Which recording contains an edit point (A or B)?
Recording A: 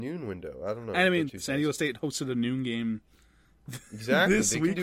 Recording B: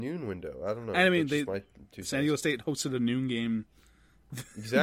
A